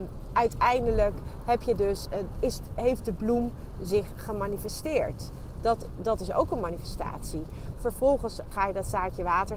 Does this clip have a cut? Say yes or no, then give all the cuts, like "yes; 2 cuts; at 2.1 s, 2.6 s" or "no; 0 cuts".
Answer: yes; 2 cuts; at 2.4 s, 7.7 s